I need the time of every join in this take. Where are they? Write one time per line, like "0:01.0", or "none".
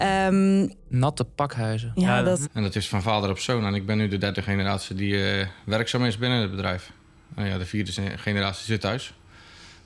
0:02.4